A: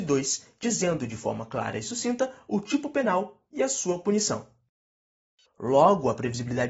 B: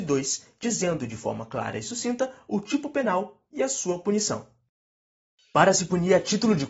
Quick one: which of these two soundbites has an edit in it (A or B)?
A